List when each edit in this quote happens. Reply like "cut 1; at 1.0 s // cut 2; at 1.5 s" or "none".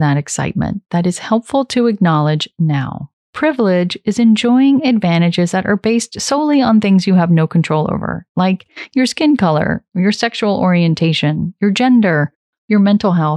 cut 1; at 3.2 s